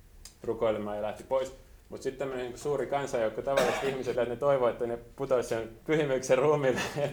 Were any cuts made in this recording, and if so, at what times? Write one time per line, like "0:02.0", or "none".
0:04.2
0:05.8